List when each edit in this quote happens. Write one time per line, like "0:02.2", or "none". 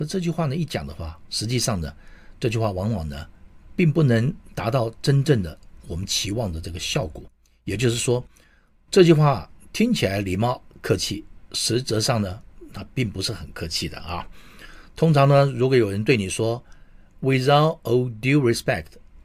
none